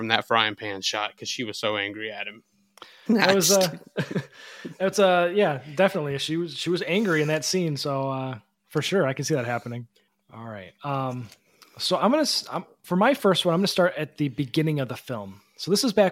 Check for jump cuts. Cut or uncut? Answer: cut